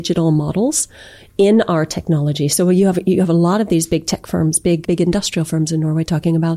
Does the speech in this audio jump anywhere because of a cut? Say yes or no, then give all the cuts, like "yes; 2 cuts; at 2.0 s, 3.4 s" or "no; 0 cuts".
yes; 1 cut; at 4.8 s